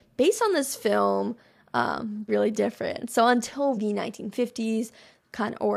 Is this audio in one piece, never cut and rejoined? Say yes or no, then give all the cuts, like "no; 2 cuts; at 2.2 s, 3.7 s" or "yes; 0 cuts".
no; 2 cuts; at 2.3 s, 3.8 s